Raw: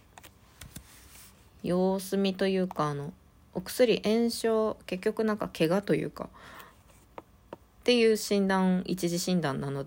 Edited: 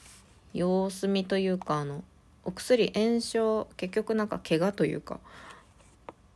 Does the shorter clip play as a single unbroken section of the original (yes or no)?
yes